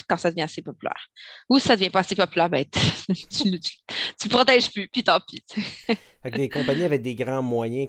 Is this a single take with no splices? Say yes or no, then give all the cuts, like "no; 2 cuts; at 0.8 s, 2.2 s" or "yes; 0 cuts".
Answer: yes; 0 cuts